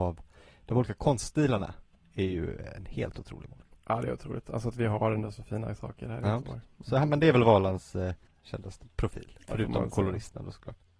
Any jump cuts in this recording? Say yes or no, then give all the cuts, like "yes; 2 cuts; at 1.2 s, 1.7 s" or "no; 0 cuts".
yes; 1 cut; at 8.3 s